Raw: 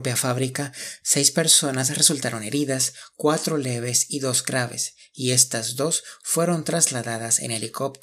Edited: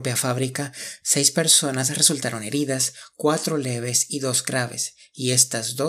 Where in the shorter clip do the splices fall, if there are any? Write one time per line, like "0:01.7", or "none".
none